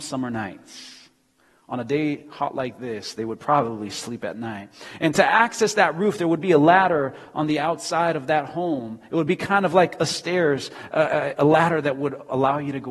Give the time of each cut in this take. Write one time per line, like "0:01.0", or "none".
none